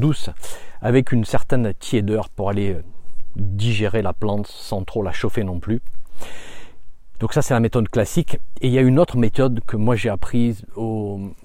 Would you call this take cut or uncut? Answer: uncut